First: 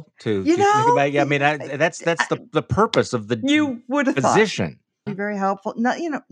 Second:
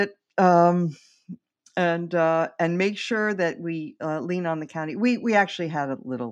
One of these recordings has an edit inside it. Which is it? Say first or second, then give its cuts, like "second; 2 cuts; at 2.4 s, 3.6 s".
first; 1 cut; at 5.1 s